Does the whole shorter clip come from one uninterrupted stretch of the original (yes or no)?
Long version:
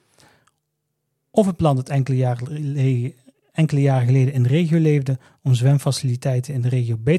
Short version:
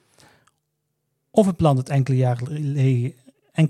yes